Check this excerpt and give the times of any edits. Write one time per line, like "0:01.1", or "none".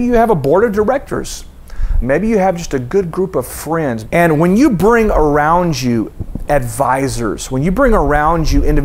0:02.0
0:04.0